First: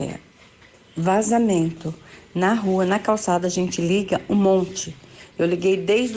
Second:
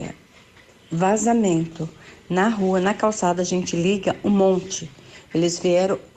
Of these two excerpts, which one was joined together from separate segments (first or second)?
second